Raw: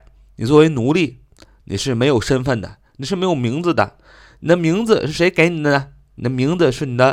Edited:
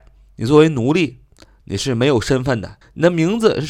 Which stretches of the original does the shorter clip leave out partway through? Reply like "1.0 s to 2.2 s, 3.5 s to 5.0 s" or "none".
2.8 s to 4.3 s